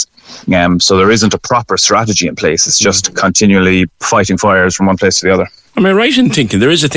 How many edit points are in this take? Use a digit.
0